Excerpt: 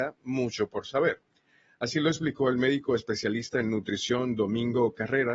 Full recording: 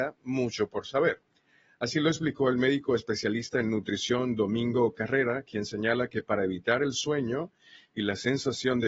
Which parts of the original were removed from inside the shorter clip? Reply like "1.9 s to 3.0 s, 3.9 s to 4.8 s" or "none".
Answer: none